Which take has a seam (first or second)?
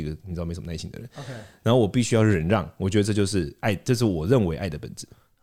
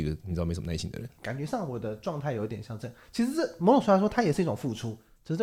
second